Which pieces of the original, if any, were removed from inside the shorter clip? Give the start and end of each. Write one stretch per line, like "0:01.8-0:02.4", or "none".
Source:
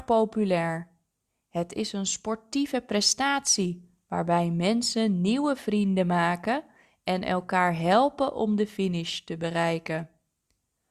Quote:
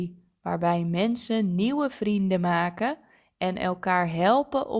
none